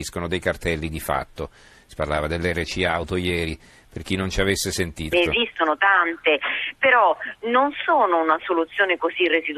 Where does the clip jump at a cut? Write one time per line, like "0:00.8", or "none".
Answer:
0:05.1